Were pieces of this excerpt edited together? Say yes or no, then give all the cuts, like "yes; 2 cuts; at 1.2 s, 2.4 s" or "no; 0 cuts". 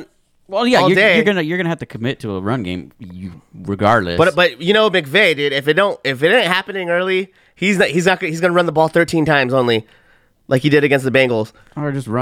no; 0 cuts